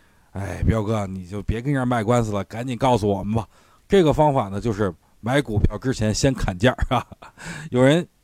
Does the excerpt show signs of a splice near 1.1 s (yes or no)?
no